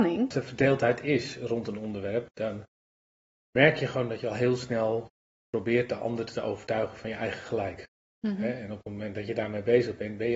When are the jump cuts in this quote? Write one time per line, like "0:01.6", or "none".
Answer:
none